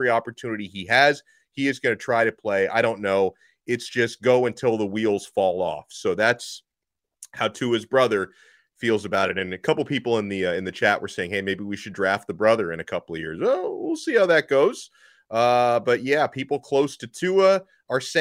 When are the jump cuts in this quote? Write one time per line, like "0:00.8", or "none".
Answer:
none